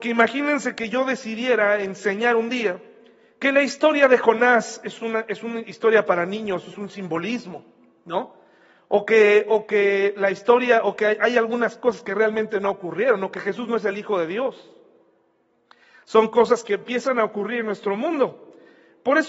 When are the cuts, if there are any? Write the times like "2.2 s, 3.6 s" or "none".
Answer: none